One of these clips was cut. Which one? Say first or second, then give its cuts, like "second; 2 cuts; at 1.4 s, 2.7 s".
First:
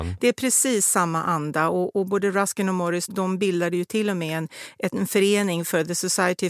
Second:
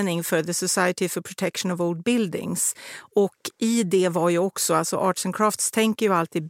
first; 1 cut; at 3.1 s